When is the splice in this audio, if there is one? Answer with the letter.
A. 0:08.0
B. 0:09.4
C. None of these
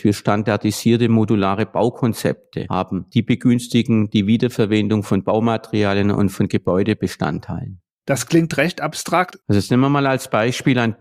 B